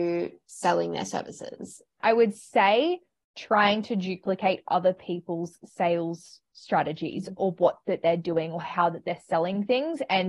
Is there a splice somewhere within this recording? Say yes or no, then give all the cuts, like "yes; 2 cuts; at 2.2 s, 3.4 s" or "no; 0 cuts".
yes; 2 cuts; at 2.0 s, 7.4 s